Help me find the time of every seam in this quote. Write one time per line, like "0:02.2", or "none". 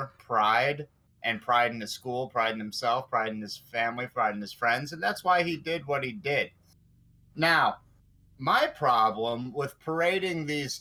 none